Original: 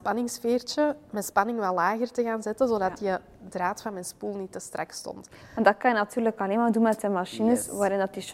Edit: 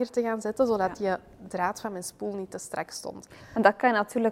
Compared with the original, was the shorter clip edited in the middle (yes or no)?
no